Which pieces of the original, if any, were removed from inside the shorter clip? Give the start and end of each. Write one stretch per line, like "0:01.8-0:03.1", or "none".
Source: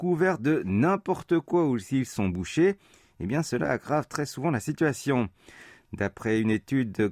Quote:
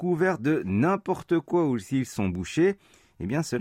none